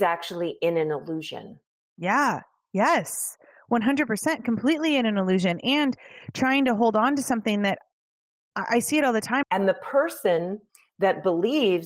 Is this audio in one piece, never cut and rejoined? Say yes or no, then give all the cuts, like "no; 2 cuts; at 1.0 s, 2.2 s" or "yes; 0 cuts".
no; 1 cut; at 9.4 s